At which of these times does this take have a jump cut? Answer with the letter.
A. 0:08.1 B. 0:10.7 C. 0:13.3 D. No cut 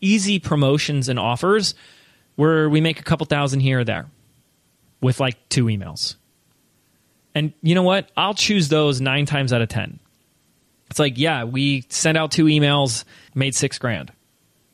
C